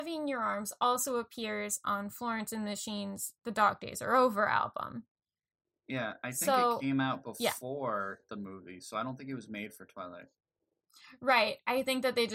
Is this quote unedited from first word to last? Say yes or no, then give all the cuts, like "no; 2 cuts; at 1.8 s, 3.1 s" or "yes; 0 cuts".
yes; 0 cuts